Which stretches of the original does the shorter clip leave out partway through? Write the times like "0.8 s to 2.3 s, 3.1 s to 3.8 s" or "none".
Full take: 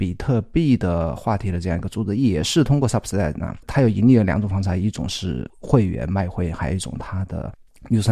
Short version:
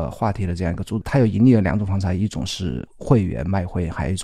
2.1 s to 3.6 s